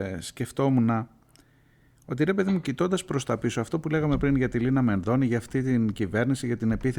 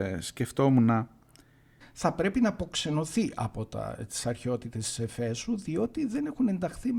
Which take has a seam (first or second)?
second